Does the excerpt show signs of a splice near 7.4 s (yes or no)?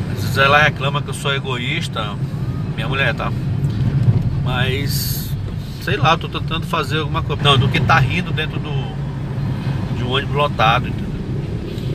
yes